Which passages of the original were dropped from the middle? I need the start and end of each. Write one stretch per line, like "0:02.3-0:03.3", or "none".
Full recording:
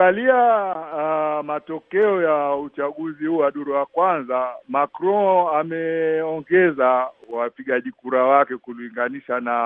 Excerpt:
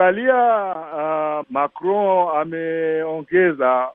0:01.4-0:04.6